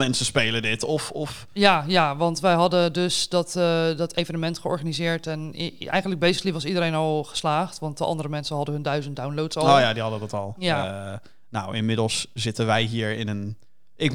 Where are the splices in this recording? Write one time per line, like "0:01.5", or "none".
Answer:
0:10.6